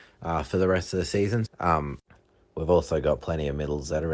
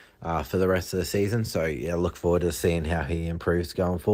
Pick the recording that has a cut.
first; 1 cut; at 1.5 s

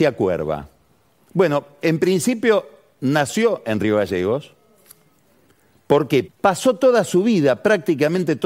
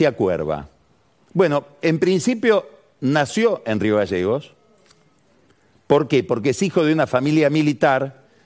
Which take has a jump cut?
first; 1 cut; at 6.3 s

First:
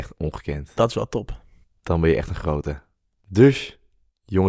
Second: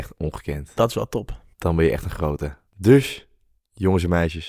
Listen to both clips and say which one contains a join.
second; 2 cuts; at 1.5 s, 2.7 s

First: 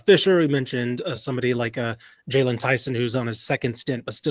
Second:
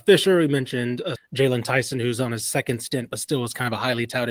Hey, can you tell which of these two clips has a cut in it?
second; 1 cut; at 1.2 s

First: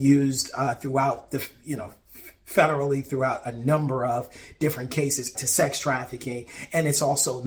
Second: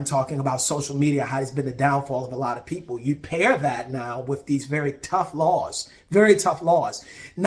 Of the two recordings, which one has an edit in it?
first; 1 cut; at 5.3 s

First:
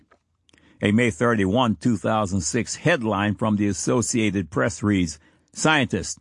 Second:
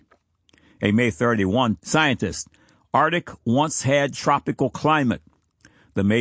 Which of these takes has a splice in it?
second; 1 cut; at 1.8 s

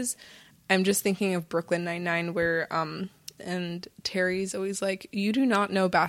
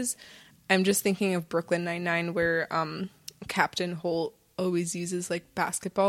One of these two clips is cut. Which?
first; 1 cut; at 3.4 s

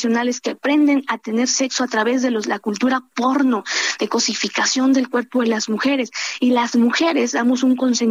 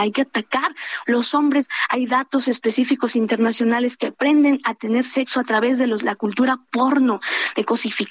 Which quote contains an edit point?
second; 1 cut; at 1.1 s

